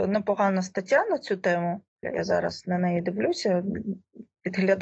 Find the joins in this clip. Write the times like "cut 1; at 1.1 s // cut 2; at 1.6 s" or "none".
cut 1; at 2.0 s